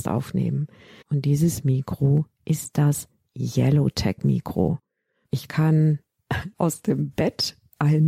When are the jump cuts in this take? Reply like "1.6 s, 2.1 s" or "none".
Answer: 1.0 s, 5.2 s, 6.5 s